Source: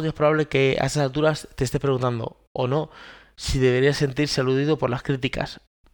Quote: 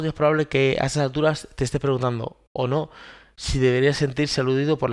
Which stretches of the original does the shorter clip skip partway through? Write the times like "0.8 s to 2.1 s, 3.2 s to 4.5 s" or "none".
none